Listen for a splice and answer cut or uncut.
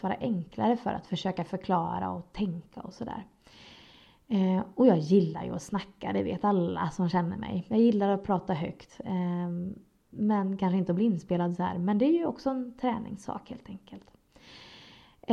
uncut